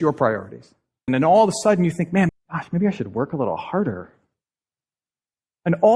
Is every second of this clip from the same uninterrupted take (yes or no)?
no